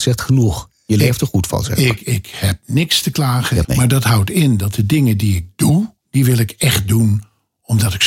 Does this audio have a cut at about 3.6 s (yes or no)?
yes